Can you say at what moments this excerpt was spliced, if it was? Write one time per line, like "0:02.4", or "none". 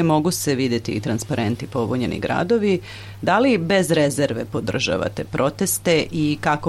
none